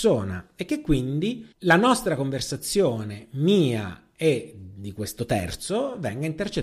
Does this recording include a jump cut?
yes; 1 cut; at 1.5 s

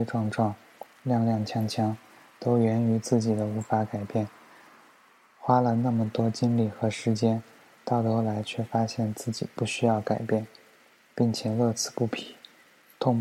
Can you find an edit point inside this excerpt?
no; 0 cuts

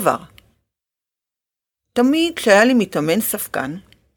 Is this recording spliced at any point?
no; 0 cuts

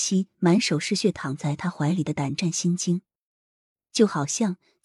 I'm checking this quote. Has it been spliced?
no; 0 cuts

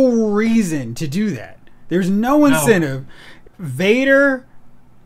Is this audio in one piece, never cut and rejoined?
no; 1 cut; at 3.5 s

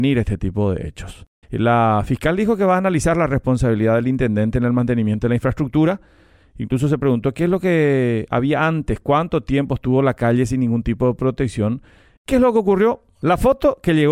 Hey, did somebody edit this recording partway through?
yes; 2 cuts; at 1.4 s, 12.2 s

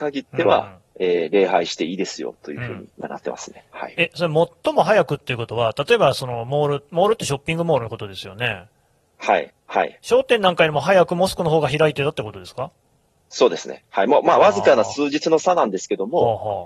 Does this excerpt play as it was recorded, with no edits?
no; 1 cut; at 9.5 s

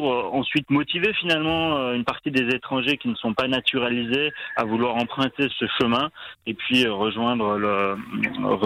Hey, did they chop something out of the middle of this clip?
yes; 1 cut; at 5.5 s

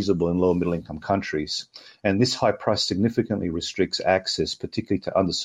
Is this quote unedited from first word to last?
yes; 0 cuts

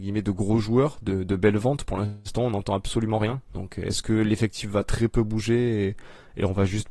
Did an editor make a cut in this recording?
no; 0 cuts

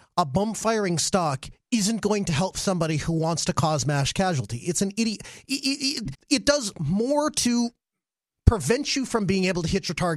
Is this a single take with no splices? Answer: no; 1 cut; at 6.1 s

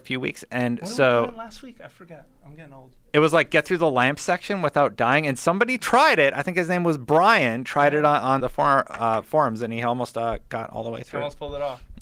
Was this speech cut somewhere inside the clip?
yes; 1 cut; at 8.4 s

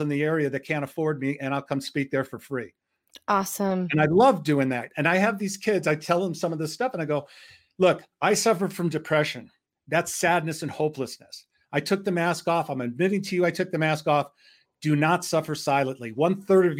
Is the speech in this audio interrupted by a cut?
no; 0 cuts

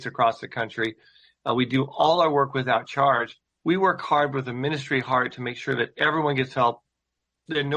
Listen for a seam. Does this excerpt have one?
yes; 1 cut; at 3.6 s

